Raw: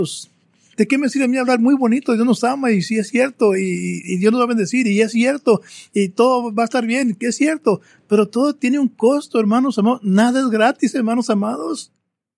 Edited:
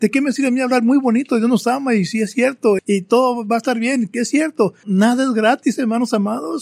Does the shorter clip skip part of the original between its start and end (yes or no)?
yes